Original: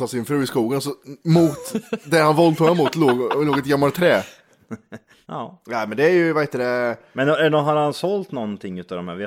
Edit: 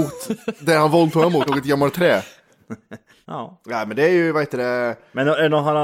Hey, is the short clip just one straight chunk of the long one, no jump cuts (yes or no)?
no